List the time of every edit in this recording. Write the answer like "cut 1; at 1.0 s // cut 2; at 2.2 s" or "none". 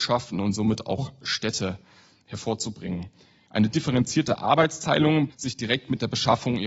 cut 1; at 3.5 s // cut 2; at 5.3 s

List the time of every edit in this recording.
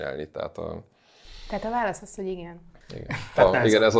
none

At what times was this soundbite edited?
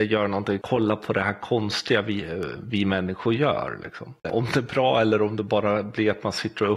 cut 1; at 4.2 s

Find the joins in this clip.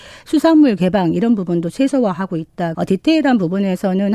cut 1; at 2.7 s

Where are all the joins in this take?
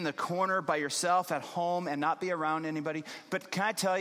none

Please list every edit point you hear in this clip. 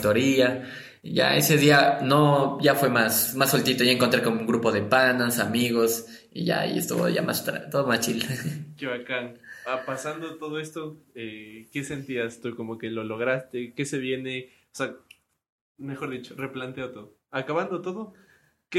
none

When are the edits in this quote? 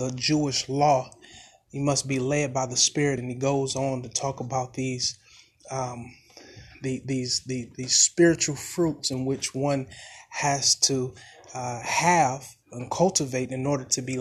none

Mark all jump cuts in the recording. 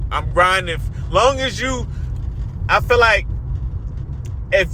none

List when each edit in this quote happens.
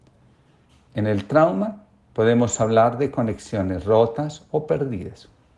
none

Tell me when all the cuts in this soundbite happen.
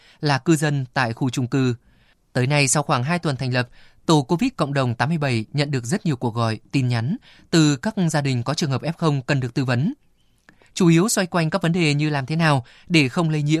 none

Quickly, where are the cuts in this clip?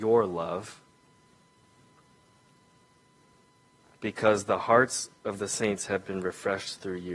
none

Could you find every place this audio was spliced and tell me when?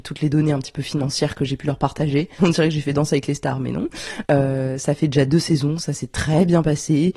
cut 1; at 2.4 s // cut 2; at 4.2 s

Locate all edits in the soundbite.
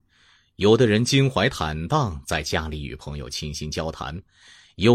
none

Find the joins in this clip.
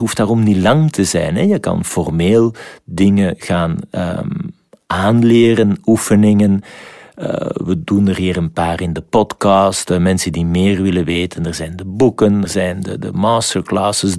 cut 1; at 12.5 s

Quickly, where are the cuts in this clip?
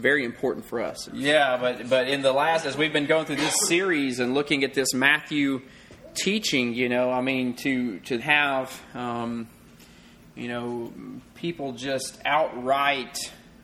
cut 1; at 1.1 s // cut 2; at 8.2 s

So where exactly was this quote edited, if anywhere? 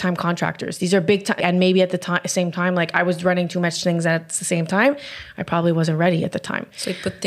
cut 1; at 1.4 s

